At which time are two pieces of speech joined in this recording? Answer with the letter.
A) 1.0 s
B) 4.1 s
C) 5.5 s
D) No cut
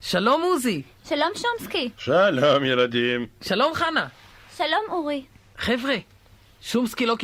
D